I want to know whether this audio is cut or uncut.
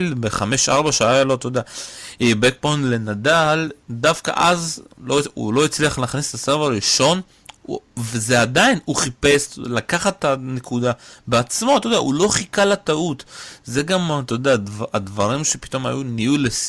uncut